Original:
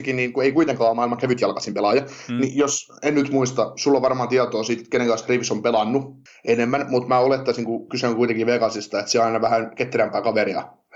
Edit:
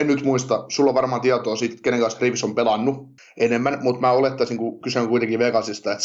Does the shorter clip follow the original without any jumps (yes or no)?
yes